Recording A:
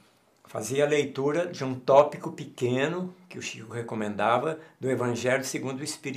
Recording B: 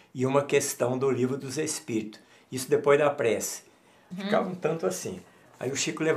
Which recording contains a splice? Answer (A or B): B